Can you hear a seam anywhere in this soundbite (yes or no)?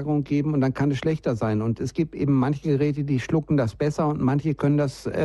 no